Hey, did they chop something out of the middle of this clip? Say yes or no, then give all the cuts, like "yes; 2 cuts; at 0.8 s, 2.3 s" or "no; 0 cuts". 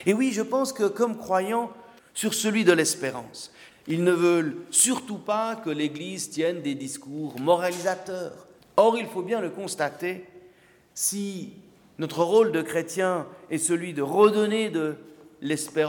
yes; 3 cuts; at 2.0 s, 3.7 s, 8.6 s